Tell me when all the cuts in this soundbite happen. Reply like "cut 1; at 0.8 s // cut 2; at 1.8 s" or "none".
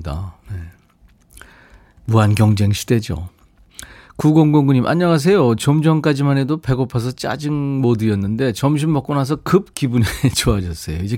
none